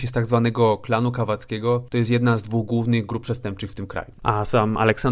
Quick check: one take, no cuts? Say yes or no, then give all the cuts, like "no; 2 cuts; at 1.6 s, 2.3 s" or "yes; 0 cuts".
no; 1 cut; at 4.1 s